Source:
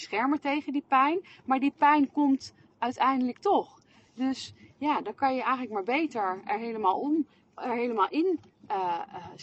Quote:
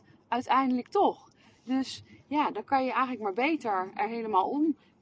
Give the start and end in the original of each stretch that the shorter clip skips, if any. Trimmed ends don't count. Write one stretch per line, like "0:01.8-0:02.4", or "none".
none